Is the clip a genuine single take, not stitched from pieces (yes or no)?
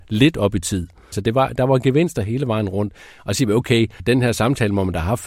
no